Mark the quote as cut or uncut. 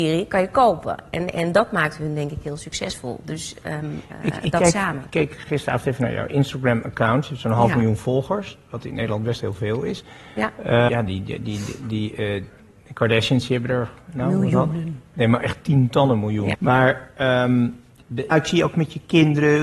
cut